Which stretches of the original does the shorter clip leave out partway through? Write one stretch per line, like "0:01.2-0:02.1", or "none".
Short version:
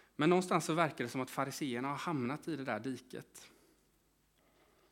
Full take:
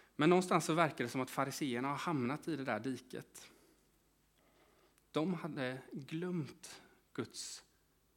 none